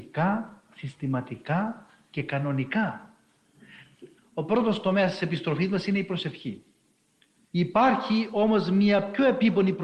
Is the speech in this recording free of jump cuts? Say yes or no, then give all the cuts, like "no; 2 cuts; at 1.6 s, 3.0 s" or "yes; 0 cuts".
no; 2 cuts; at 4.2 s, 7.4 s